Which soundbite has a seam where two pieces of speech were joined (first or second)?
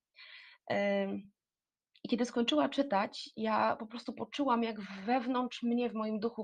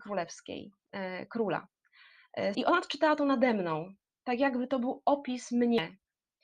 second